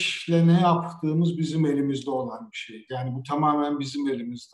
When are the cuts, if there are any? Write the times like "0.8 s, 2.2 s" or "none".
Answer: 2.9 s